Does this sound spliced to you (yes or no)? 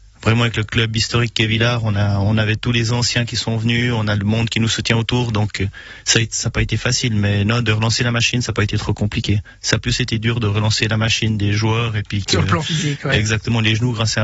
no